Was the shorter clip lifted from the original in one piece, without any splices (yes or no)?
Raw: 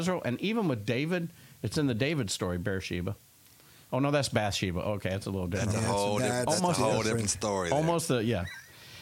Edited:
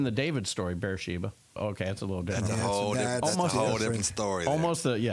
no